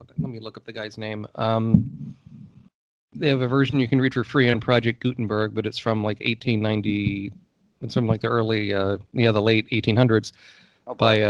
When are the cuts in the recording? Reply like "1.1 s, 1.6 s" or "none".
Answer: none